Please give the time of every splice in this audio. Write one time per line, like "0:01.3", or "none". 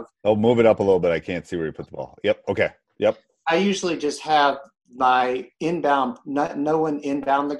none